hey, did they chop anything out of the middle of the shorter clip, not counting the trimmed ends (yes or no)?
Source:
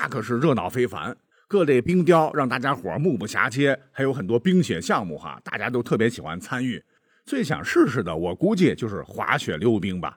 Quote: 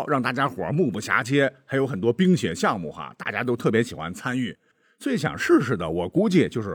no